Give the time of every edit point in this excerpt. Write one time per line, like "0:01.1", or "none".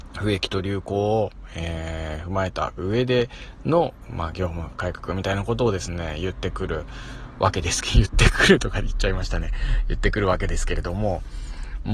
none